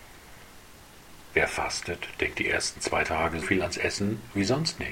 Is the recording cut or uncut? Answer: cut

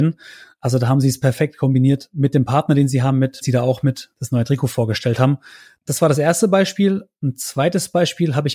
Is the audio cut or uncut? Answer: cut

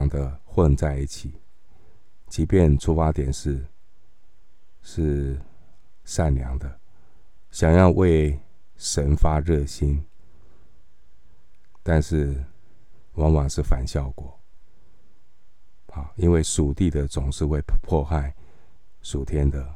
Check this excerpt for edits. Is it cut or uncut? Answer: uncut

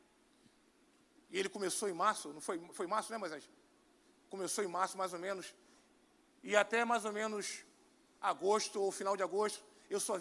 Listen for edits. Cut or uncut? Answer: uncut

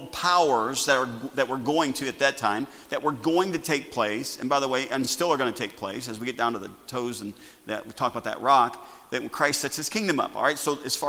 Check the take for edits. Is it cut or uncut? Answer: uncut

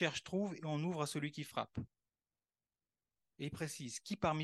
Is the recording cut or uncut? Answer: uncut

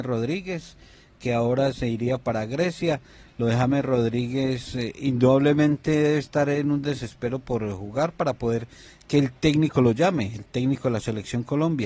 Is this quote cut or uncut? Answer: uncut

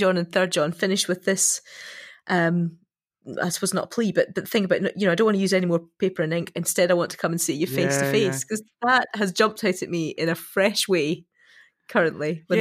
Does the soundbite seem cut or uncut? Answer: uncut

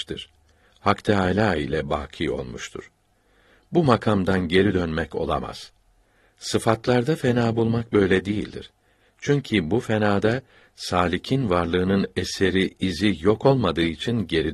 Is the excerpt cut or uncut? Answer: uncut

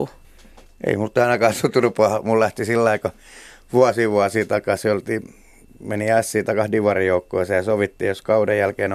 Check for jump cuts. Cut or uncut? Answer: uncut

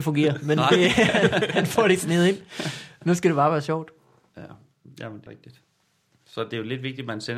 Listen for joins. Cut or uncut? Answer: cut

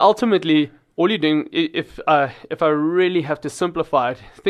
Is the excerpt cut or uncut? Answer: uncut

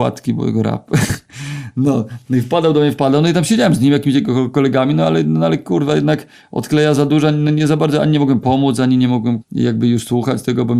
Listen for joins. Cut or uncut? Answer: cut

